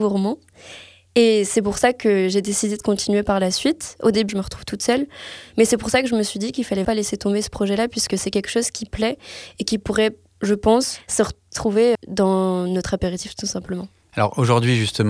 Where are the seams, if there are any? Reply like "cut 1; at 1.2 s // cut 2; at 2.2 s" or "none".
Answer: cut 1; at 4.3 s // cut 2; at 6.8 s // cut 3; at 12.0 s